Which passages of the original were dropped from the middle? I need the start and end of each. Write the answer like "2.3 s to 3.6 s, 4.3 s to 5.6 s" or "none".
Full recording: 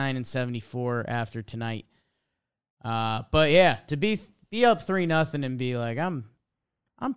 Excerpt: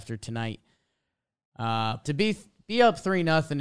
3.3 s to 3.9 s